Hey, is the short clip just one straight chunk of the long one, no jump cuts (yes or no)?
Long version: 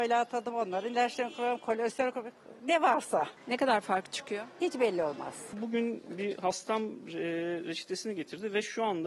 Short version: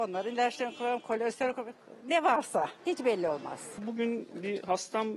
no